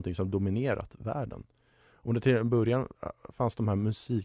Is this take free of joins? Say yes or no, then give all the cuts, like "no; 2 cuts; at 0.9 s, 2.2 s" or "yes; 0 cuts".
yes; 0 cuts